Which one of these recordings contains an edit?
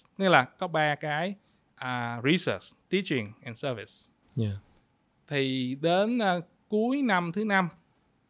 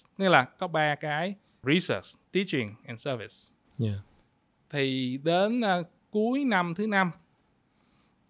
second; 1 cut; at 1.6 s

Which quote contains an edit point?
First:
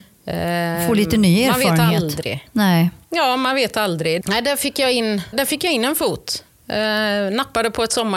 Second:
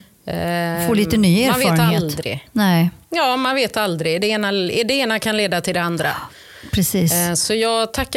first; 2 cuts; at 4.2 s, 5.3 s

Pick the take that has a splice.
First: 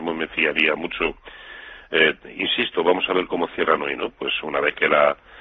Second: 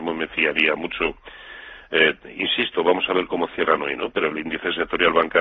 first; 1 cut; at 4.1 s

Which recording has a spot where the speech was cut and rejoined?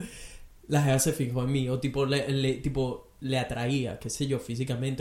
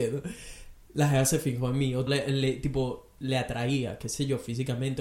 second; 1 cut; at 2.1 s

